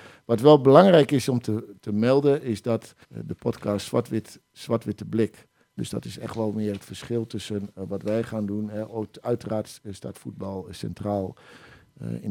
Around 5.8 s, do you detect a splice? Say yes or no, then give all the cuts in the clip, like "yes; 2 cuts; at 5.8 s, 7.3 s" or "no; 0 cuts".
yes; 2 cuts; at 3.0 s, 5.8 s